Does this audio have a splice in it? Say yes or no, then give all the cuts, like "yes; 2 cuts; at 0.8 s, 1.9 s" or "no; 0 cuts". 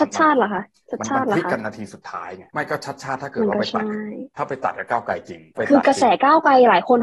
no; 0 cuts